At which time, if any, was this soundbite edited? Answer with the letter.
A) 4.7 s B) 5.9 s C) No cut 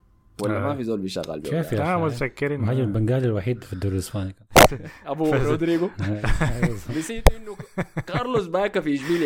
A